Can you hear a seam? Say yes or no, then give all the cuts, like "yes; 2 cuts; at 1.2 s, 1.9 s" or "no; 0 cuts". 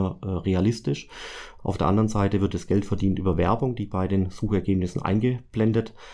yes; 1 cut; at 1.6 s